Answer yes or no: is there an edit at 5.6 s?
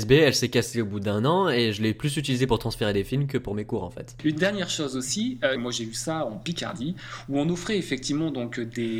yes